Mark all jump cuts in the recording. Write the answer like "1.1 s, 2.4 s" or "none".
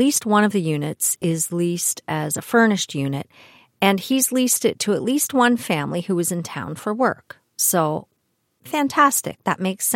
none